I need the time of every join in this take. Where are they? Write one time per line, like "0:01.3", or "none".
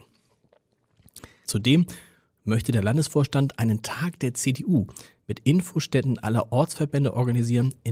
0:01.4